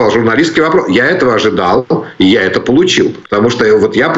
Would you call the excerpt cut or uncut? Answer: cut